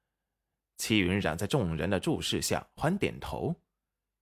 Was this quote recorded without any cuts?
no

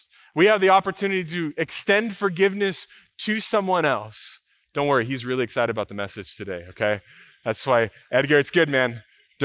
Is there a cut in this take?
no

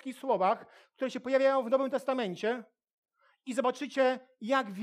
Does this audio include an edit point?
no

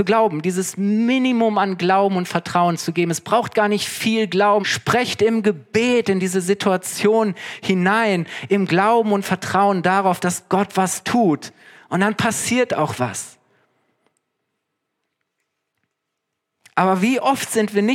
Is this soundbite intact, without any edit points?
no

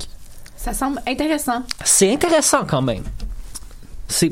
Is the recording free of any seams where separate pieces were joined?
yes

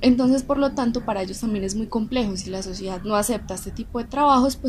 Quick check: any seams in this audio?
no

